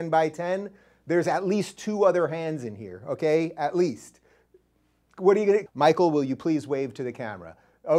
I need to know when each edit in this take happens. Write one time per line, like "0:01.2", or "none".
0:05.7